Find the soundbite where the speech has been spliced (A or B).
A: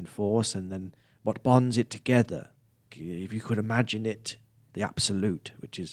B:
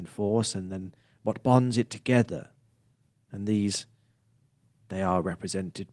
A